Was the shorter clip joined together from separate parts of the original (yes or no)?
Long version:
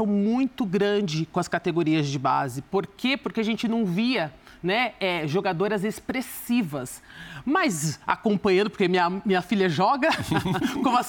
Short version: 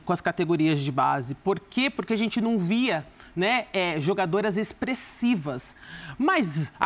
no